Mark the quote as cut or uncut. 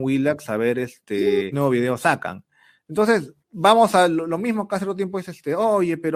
cut